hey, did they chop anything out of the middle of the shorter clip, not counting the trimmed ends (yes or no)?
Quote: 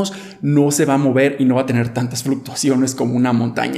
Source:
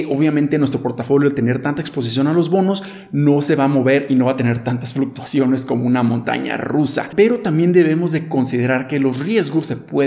no